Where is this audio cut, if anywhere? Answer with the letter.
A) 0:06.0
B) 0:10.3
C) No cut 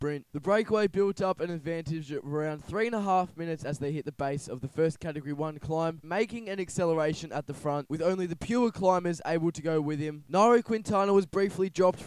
A